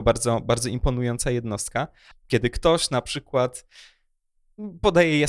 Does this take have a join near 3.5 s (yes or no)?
no